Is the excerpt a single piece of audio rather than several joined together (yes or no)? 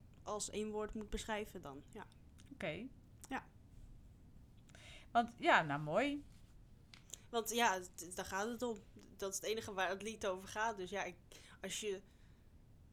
yes